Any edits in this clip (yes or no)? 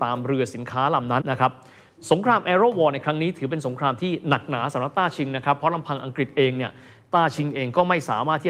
yes